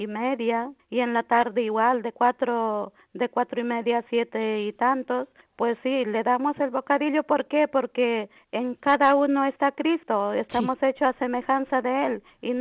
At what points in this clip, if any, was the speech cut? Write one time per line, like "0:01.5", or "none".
none

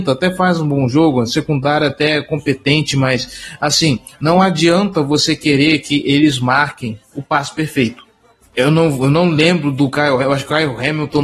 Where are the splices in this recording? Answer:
0:08.4

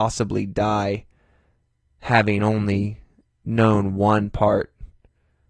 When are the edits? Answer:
none

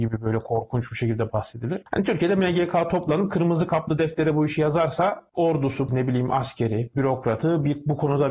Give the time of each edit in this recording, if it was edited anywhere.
0:05.9
0:06.9

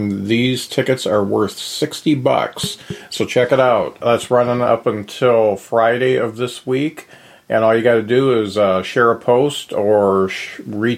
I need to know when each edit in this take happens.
none

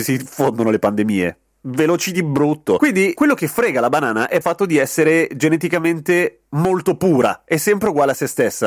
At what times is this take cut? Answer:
0:03.1
0:04.4

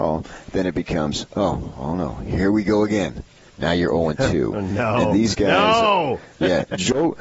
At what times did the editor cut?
0:03.5

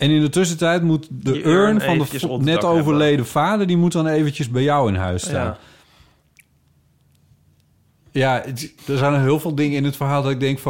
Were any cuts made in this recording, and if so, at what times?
0:08.8

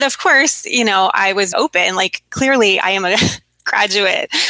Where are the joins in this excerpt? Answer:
0:01.5

